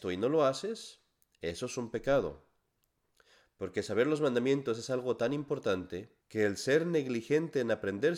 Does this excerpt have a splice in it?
yes; 1 cut; at 6.2 s

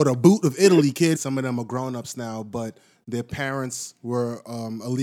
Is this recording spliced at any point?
yes; 1 cut; at 1.1 s

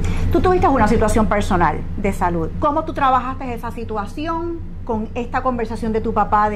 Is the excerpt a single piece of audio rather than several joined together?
no; 1 cut; at 2.5 s

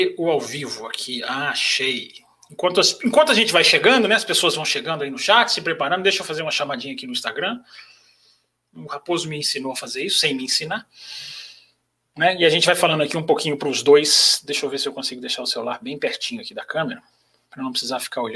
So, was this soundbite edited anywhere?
no; 0 cuts

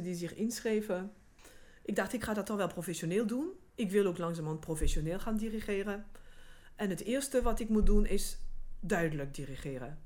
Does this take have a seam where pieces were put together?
no; 0 cuts

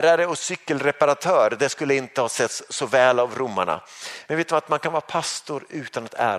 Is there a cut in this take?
yes; 1 cut; at 4.3 s

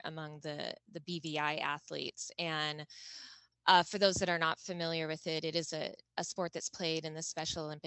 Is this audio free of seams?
yes; 0 cuts

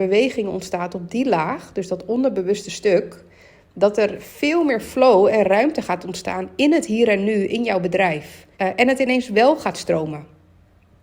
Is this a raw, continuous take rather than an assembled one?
no; 1 cut; at 8.5 s

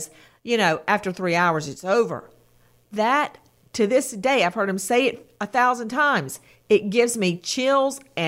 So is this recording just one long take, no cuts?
yes; 0 cuts

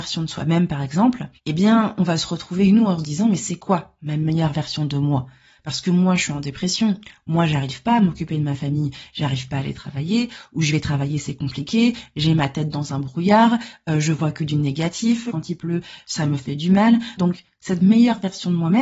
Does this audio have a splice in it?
yes; 3 cuts; at 1.4 s, 15.3 s, 17.2 s

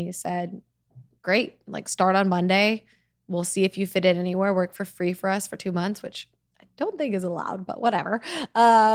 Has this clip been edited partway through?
no; 0 cuts

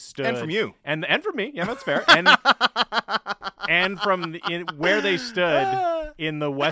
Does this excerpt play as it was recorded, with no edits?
yes; 0 cuts

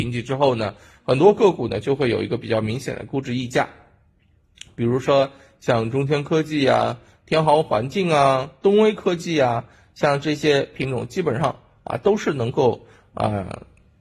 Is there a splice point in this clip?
no; 0 cuts

